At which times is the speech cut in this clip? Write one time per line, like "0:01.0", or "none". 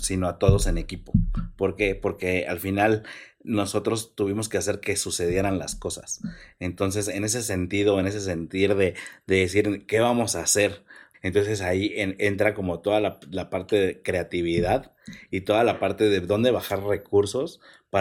0:11.1